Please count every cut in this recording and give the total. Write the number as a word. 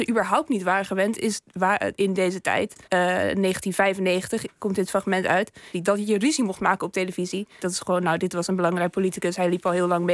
three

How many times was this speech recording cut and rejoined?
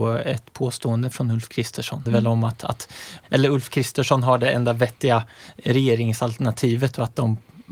two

